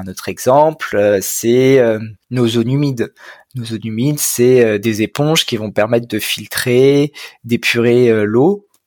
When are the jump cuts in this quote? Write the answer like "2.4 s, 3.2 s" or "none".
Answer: 2.2 s